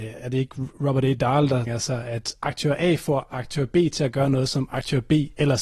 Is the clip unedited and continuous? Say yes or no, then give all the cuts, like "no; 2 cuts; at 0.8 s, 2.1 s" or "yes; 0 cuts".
no; 1 cut; at 1.7 s